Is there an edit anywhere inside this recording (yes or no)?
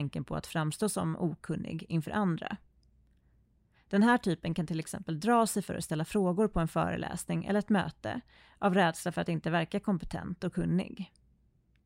no